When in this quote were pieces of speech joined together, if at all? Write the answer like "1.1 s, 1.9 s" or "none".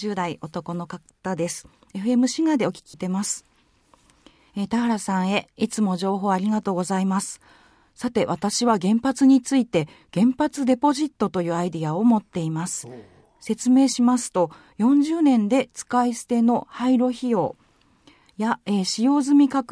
2.9 s